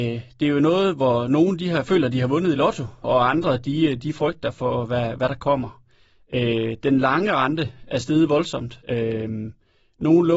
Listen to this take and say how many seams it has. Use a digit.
2